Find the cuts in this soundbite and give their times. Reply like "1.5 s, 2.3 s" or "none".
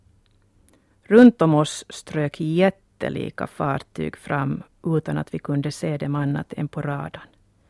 0.9 s